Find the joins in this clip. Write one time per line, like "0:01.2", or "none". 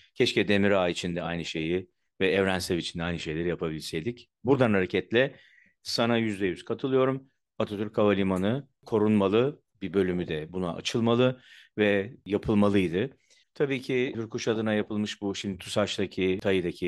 0:09.7
0:13.4